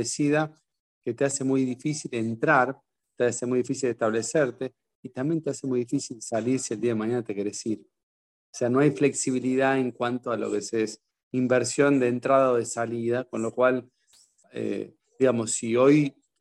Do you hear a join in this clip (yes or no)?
no